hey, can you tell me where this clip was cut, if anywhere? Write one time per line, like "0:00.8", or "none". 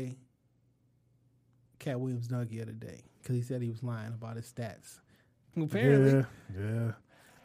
0:01.7
0:05.5